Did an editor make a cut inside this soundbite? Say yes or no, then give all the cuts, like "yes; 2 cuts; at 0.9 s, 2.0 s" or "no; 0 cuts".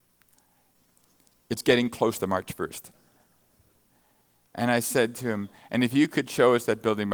yes; 1 cut; at 2.9 s